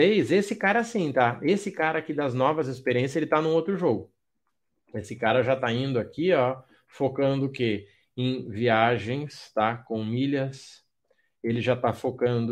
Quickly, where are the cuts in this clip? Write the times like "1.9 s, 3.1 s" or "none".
none